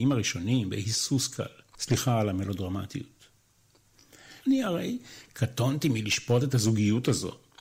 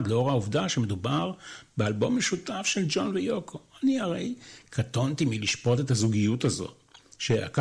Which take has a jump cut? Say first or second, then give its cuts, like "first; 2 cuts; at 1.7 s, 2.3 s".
first; 2 cuts; at 1.7 s, 4.4 s